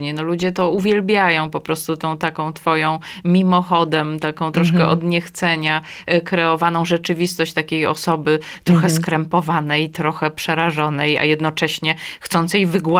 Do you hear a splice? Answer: no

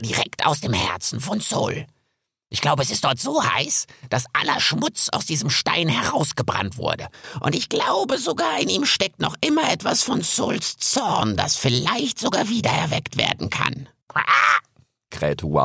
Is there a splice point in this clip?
no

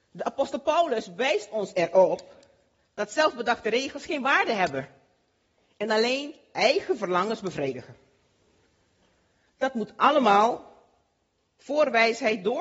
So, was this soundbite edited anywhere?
no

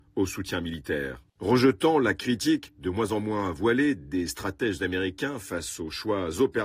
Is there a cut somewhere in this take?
yes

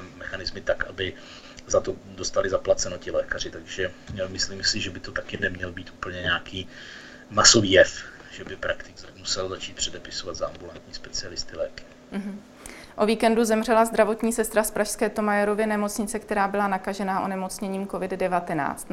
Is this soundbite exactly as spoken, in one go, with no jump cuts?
yes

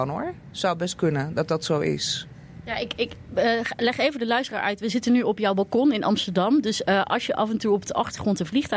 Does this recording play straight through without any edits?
yes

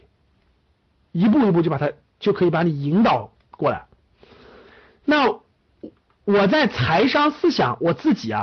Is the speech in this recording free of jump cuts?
yes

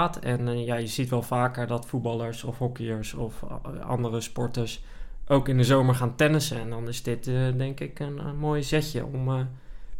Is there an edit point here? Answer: no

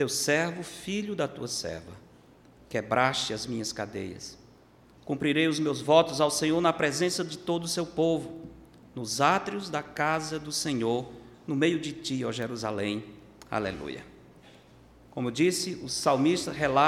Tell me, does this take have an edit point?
yes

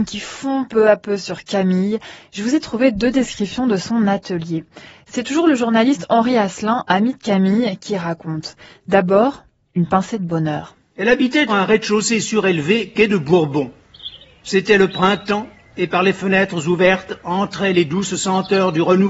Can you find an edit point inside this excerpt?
yes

